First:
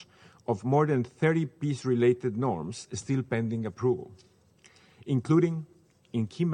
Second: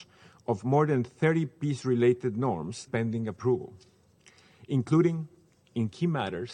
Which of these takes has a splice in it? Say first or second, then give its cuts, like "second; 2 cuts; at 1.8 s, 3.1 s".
second; 1 cut; at 2.9 s